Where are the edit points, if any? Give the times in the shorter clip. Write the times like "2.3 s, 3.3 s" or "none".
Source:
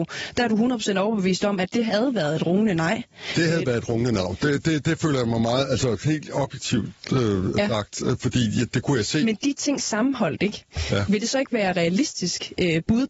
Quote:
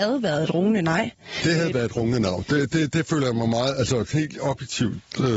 none